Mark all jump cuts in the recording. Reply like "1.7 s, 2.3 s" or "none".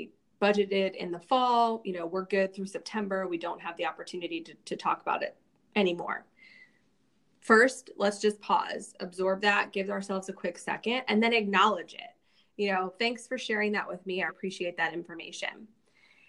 14.3 s